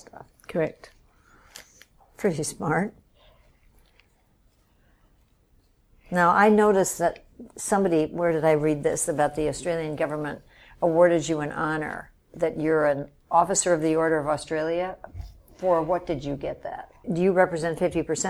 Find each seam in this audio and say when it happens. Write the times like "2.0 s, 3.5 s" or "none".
17.0 s